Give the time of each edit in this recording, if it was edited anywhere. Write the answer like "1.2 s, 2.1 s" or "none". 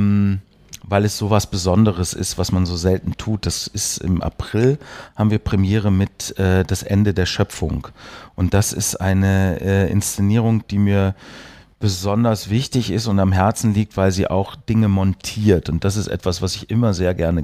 none